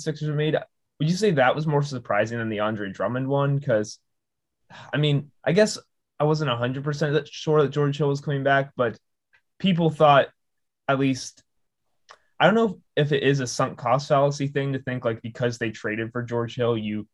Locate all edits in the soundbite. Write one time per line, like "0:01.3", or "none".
none